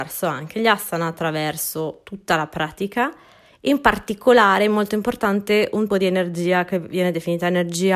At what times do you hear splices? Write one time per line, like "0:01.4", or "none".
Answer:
0:05.9